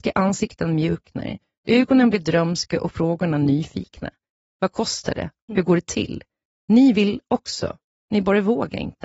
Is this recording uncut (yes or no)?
yes